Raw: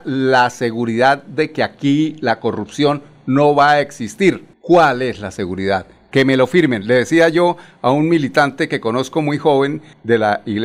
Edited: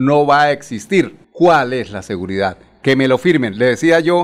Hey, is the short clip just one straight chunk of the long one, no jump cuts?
yes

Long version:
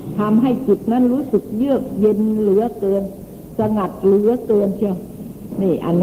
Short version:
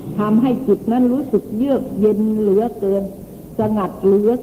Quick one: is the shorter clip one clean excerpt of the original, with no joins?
yes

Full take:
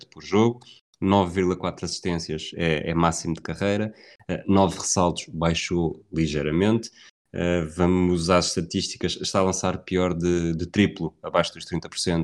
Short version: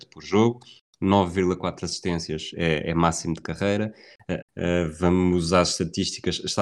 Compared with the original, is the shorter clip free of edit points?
no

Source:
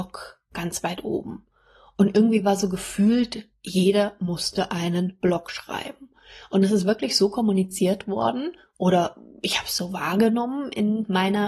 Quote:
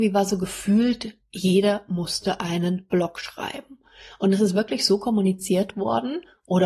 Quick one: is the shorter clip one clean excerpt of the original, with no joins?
yes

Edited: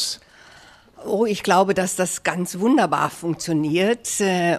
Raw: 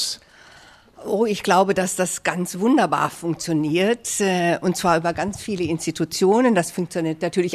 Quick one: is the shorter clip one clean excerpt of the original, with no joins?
yes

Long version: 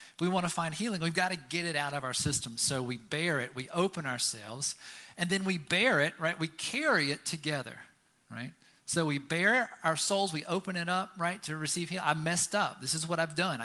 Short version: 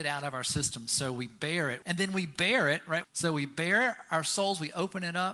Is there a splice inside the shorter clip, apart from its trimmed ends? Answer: yes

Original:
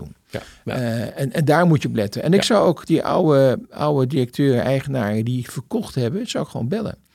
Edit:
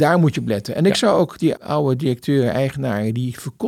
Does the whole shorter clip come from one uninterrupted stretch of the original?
no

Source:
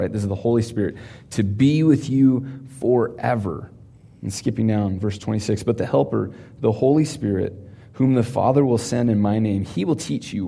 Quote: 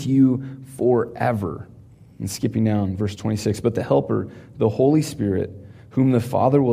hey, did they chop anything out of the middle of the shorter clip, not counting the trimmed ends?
no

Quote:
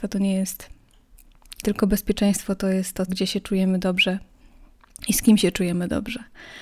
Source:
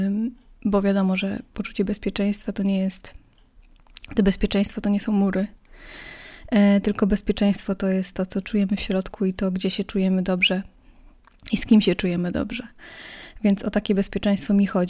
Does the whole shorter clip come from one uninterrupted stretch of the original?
no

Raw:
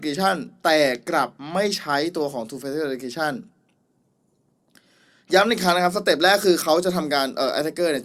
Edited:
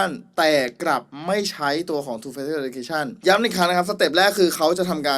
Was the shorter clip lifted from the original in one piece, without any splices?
no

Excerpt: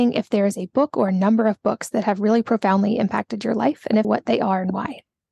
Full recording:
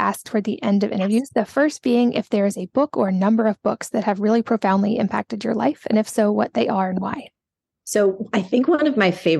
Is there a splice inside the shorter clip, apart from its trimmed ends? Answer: yes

